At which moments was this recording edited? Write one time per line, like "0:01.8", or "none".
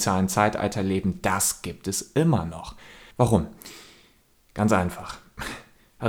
0:03.1